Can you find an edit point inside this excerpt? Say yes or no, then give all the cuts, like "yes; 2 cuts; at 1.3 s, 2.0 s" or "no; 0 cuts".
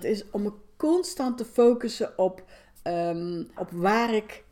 yes; 1 cut; at 3.6 s